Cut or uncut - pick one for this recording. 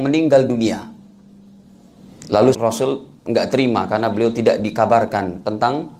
cut